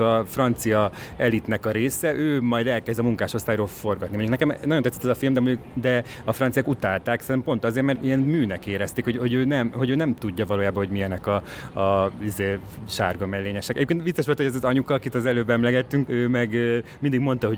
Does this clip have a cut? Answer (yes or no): yes